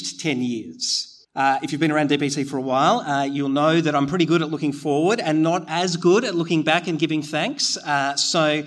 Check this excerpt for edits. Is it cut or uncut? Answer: cut